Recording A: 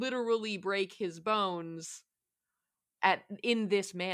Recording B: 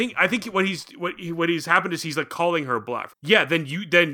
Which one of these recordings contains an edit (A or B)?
B